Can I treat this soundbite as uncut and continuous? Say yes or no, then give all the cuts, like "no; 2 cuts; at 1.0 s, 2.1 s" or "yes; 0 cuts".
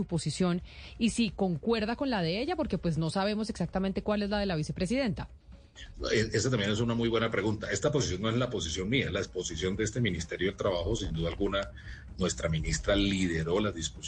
yes; 0 cuts